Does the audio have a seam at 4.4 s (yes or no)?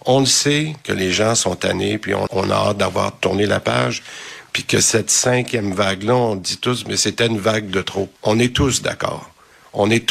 no